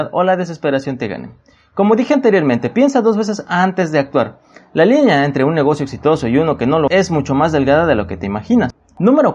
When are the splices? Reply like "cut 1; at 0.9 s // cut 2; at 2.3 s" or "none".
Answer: cut 1; at 6.9 s

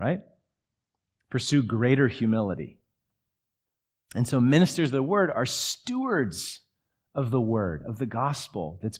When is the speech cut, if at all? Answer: none

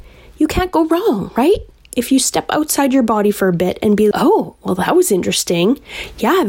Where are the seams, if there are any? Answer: cut 1; at 4.1 s

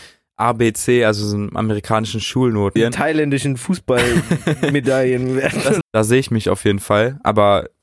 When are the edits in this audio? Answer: cut 1; at 2.8 s // cut 2; at 5.8 s

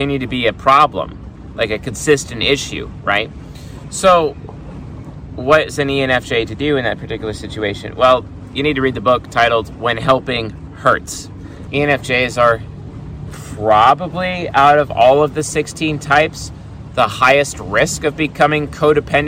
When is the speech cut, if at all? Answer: cut 1; at 11.7 s

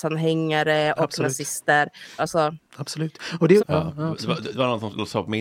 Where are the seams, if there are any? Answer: cut 1; at 2.2 s // cut 2; at 3.6 s

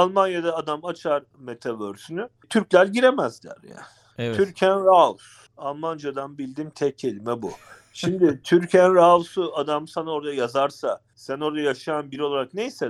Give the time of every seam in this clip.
none

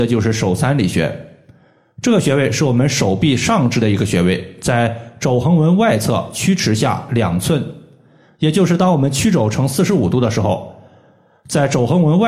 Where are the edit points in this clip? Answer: none

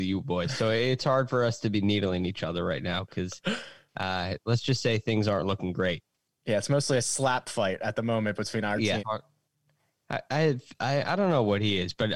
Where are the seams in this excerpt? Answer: cut 1; at 9.0 s

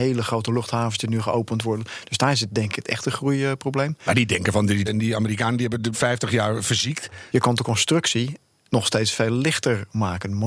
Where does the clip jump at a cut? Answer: cut 1; at 4.9 s // cut 2; at 5.9 s // cut 3; at 7.3 s

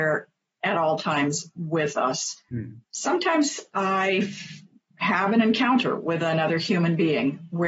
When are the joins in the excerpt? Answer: cut 1; at 2.8 s

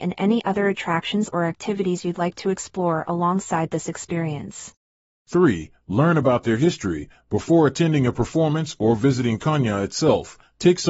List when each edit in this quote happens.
none

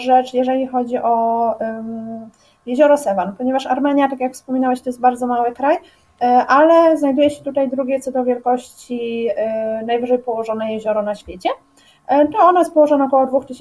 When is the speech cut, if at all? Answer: none

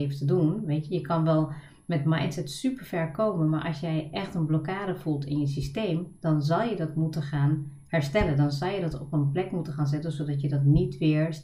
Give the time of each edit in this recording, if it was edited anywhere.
none

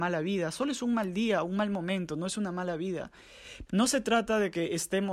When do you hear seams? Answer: cut 1; at 3.7 s

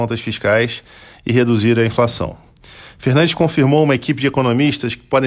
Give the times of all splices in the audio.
none

